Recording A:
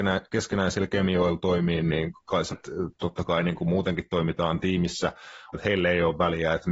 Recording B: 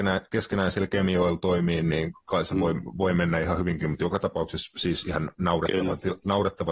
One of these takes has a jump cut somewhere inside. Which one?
A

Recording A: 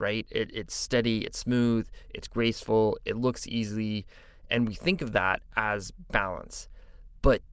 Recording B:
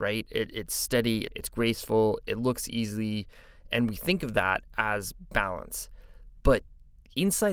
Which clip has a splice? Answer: B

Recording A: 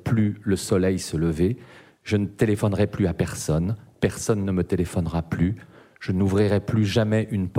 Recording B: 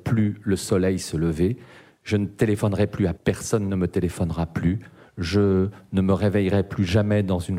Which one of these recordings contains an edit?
B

